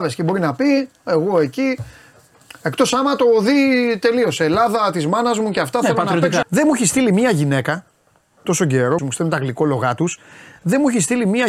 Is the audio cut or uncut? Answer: cut